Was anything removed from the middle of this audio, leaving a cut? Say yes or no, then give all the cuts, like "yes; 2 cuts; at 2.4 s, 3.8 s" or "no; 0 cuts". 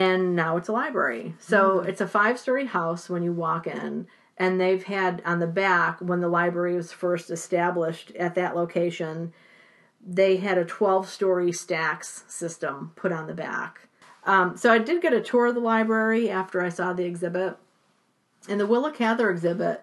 no; 0 cuts